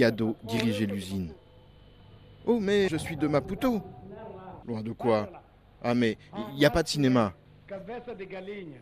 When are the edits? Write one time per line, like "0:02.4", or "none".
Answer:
0:02.9
0:04.6